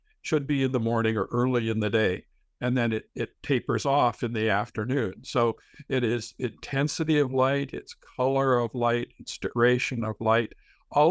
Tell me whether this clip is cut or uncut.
uncut